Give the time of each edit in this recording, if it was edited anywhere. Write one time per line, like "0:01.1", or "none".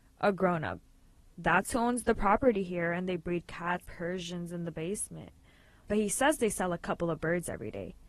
0:03.8
0:05.8